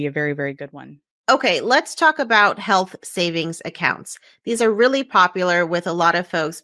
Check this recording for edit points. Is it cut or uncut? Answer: uncut